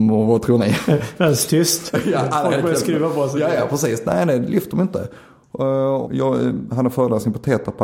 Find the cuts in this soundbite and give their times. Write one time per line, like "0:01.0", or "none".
0:06.0